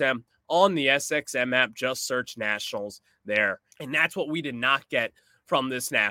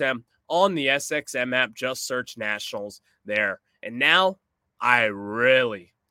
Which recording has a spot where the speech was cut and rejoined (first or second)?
first